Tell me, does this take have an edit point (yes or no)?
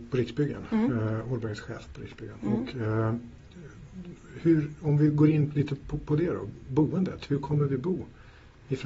no